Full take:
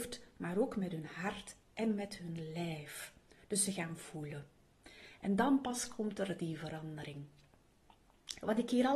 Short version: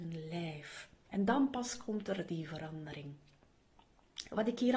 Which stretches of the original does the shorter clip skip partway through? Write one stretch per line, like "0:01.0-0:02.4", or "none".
0:03.3-0:05.2